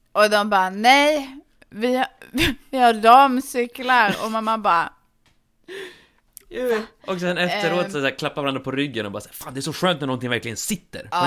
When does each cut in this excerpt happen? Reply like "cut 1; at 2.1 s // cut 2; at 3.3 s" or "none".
cut 1; at 7.9 s